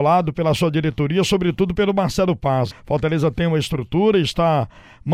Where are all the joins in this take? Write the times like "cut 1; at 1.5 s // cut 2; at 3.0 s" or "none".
cut 1; at 2.7 s

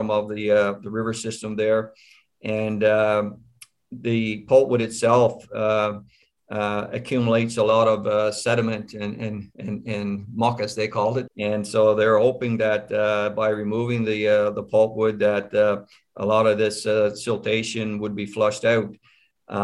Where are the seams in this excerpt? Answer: cut 1; at 11.3 s

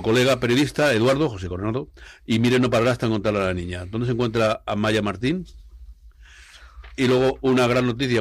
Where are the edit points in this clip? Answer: none

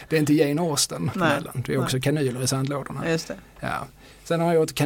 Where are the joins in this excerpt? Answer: cut 1; at 1.1 s

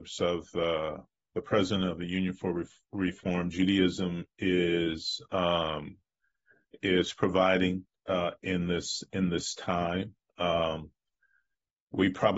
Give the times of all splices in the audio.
none

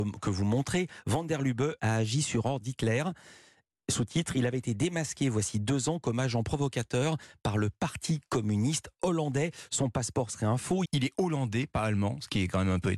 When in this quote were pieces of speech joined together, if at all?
cut 1; at 1.8 s // cut 2; at 10.8 s

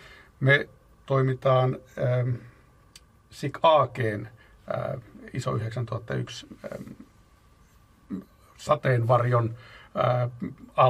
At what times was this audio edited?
none

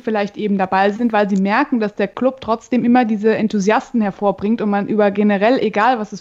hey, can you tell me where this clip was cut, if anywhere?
none

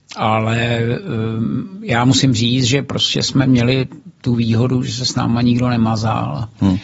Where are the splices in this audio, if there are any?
none

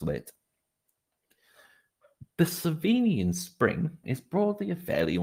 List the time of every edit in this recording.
cut 1; at 4.0 s

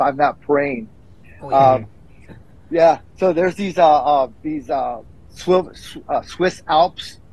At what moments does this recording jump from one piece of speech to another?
cut 1; at 1.2 s // cut 2; at 4.3 s

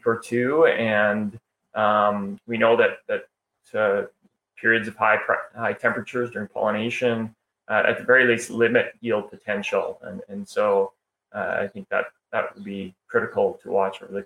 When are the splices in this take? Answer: none

